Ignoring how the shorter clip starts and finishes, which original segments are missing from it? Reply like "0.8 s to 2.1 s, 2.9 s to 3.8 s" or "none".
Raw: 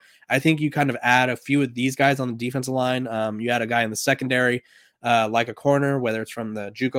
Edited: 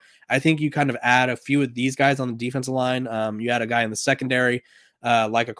none